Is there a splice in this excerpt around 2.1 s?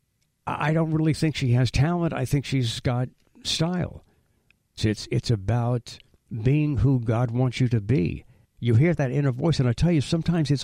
no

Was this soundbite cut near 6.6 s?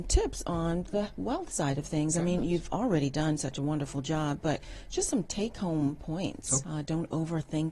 yes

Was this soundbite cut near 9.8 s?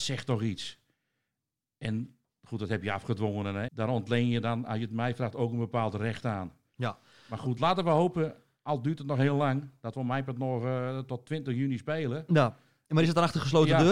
no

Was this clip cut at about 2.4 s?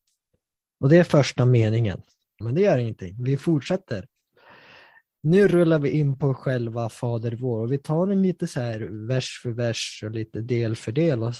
yes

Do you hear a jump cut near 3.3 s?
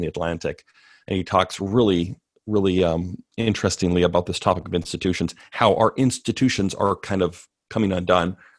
yes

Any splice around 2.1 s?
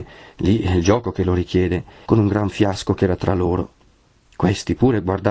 yes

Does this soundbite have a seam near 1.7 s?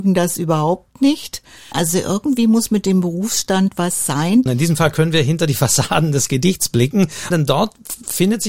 yes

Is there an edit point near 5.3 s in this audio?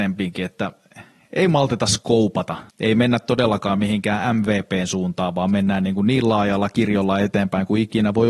no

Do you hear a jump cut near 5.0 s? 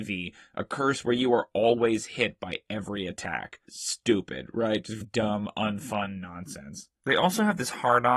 yes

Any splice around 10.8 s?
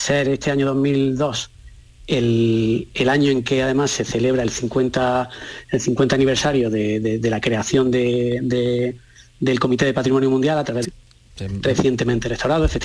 yes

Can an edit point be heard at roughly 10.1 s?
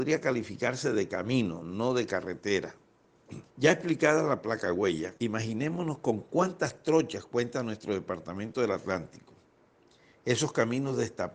no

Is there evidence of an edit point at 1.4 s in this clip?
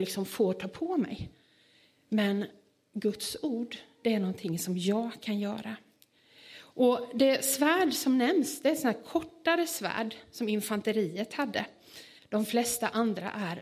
no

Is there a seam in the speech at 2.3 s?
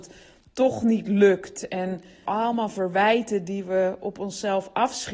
yes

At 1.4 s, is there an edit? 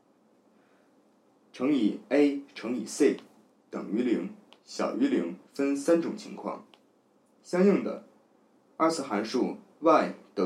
no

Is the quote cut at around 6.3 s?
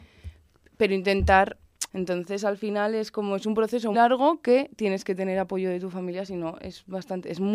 no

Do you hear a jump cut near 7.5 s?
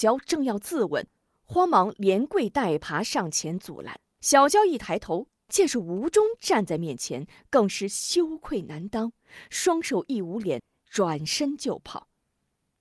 no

